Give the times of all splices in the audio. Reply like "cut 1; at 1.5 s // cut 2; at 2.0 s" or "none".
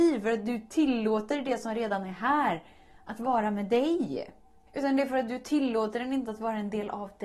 cut 1; at 4.7 s